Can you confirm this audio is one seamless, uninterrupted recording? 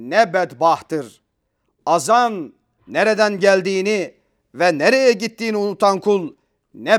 no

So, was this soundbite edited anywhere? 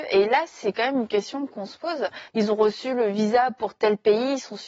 yes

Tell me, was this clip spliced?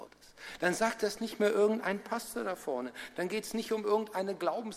no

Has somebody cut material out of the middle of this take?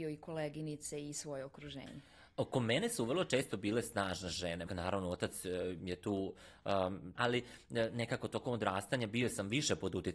yes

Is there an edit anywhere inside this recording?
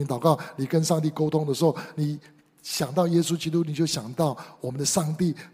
no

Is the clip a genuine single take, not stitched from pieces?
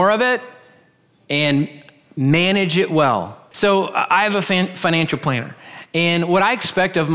no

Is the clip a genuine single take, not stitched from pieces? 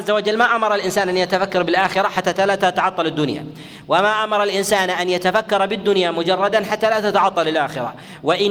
yes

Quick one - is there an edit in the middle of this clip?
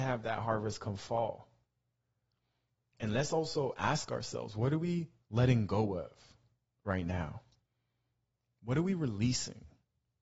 no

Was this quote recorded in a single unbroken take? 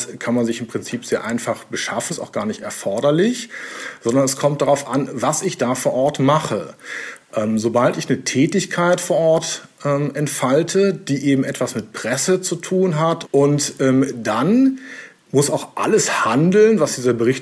no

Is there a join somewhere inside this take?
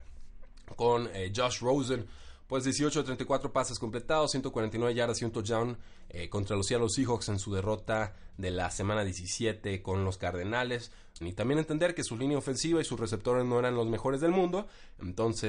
yes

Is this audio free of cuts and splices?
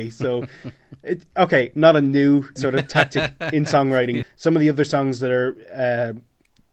no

